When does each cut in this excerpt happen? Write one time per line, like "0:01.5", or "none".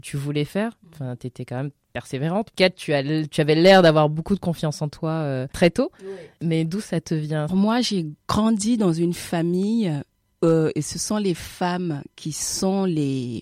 0:07.5